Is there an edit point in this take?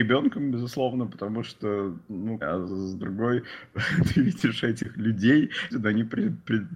yes; 2 cuts; at 2.4 s, 5.7 s

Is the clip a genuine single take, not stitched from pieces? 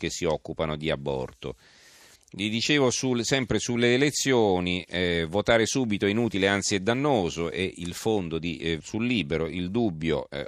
no; 2 cuts; at 2.2 s, 8.8 s

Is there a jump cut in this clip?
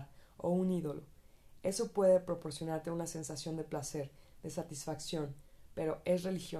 no; 0 cuts

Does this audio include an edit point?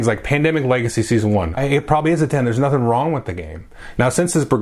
yes; 1 cut; at 1.6 s

